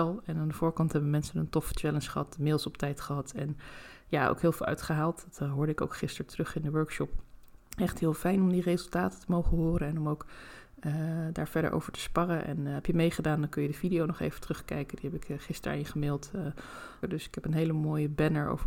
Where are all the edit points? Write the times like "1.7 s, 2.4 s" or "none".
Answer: 7.6 s, 17.0 s